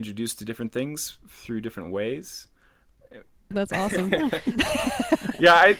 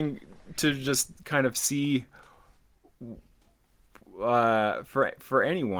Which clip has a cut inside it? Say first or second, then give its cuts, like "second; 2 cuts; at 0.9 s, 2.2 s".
first; 1 cut; at 3.5 s